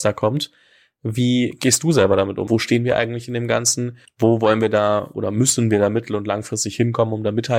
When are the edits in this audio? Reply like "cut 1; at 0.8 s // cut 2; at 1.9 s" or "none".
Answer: cut 1; at 2.5 s